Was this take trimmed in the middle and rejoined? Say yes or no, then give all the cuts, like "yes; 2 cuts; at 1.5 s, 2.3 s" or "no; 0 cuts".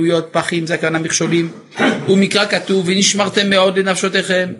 no; 0 cuts